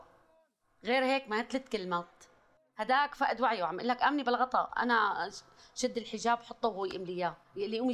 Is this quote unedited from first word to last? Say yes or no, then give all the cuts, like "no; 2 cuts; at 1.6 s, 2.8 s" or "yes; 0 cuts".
yes; 0 cuts